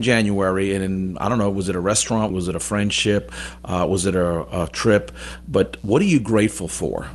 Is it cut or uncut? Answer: cut